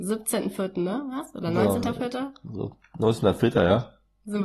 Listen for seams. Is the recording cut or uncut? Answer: uncut